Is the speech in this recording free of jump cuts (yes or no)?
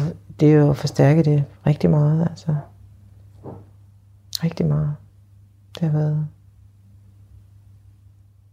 yes